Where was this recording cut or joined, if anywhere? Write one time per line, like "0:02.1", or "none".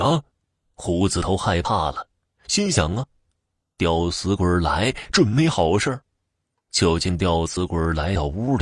none